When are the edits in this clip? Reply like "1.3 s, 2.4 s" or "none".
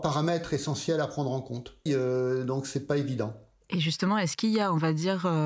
1.9 s